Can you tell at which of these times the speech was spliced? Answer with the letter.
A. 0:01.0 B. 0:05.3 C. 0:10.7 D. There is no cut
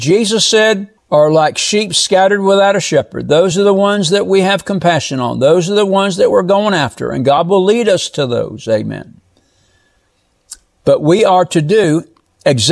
A